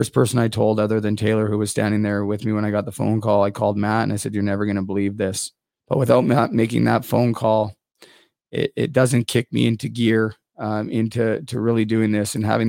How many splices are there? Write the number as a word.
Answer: one